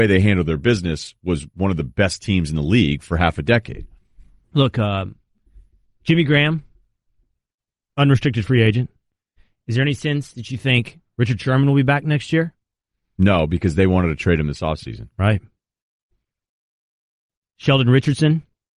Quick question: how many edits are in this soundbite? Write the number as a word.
zero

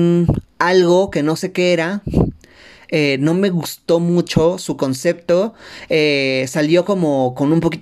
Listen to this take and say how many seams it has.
zero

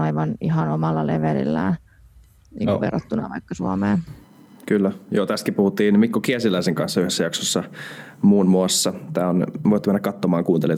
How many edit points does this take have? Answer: zero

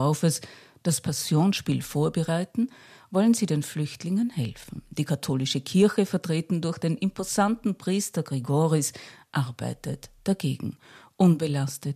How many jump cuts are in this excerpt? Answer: zero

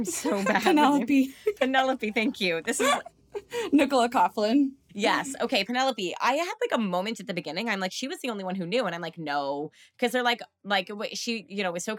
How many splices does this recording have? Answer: zero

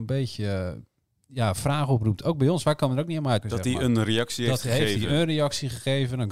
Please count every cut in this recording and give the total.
one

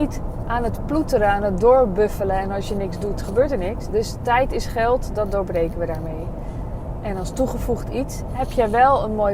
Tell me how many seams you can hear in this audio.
one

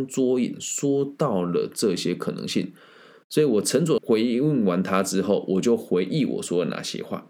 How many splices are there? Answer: one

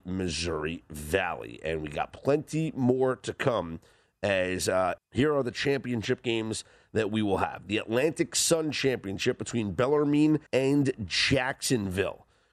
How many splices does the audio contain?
two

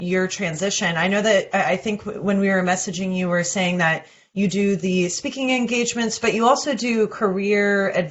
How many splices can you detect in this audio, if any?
zero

